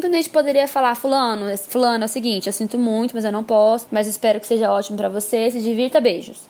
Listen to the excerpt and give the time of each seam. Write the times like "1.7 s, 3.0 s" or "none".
3.9 s